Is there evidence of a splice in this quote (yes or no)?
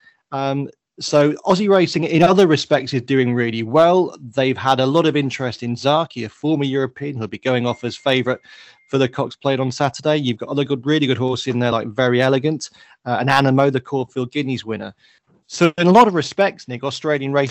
no